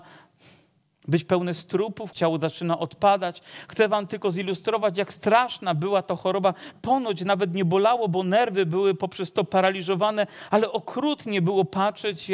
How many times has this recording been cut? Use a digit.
1